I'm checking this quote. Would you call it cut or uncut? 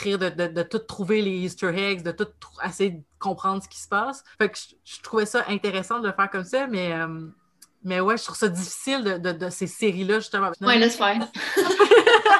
cut